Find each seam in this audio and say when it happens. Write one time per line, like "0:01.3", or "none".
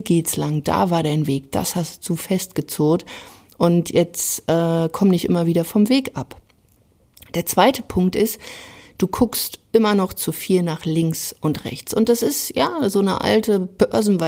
none